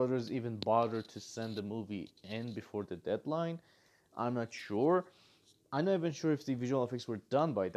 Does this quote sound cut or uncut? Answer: uncut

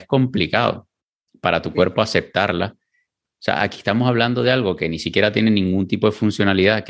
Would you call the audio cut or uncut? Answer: uncut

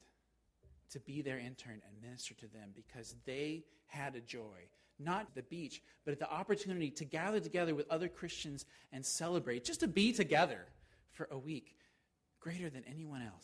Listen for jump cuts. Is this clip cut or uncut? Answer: cut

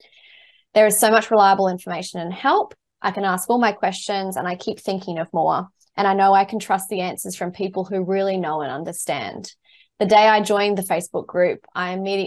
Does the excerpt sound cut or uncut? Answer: uncut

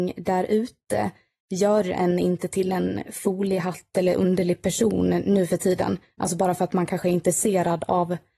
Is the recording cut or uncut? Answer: uncut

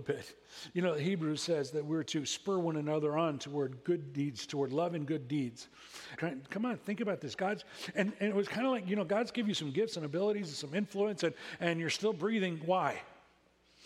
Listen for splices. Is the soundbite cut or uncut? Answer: cut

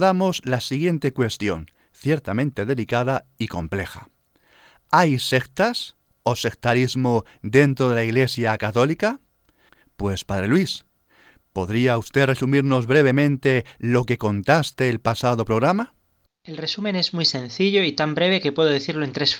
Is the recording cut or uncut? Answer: uncut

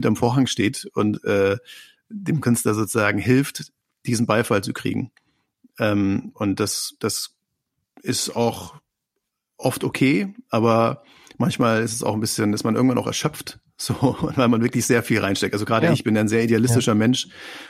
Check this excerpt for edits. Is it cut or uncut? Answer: uncut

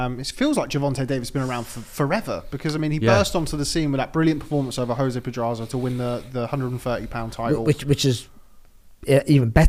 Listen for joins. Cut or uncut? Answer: uncut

